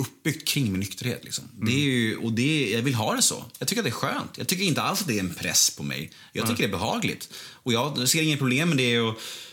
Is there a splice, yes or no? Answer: no